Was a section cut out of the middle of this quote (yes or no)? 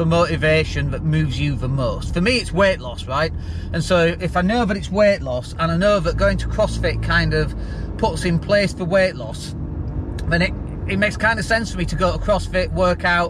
yes